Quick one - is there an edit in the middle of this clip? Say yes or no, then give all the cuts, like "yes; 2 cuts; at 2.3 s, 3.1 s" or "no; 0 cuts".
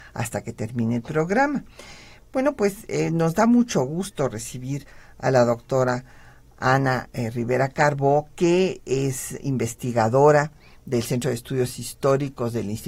no; 0 cuts